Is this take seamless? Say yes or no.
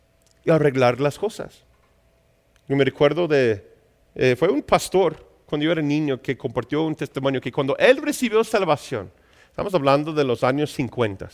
yes